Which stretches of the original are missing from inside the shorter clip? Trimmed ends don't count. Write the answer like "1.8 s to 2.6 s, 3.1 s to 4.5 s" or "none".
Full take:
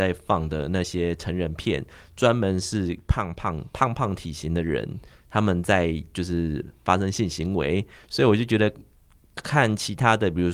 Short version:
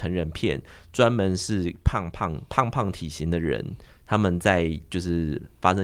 none